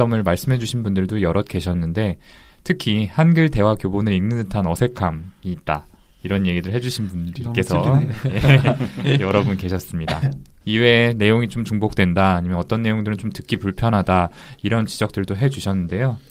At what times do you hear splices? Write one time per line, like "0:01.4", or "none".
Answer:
0:10.6